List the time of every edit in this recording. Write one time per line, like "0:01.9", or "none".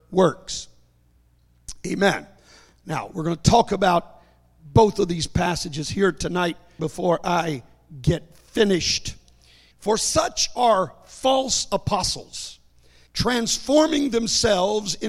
0:06.8
0:09.7
0:13.1